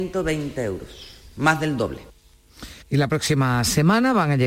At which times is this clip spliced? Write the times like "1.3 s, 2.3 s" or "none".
2.8 s